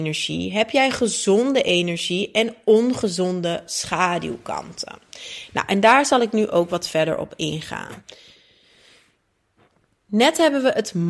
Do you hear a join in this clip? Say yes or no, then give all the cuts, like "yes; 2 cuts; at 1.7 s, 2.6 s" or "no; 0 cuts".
no; 0 cuts